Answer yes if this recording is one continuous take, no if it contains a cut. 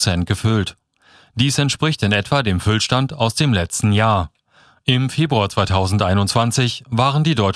yes